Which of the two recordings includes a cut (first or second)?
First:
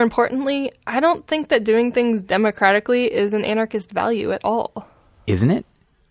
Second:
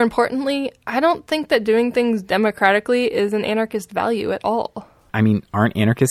second